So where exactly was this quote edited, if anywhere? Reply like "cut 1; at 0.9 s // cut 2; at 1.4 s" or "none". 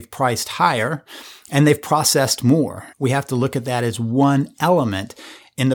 cut 1; at 2.9 s